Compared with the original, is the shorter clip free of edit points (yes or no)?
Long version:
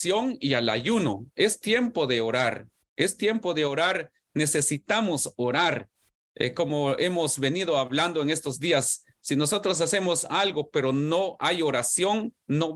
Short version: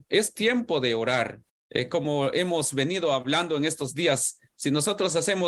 no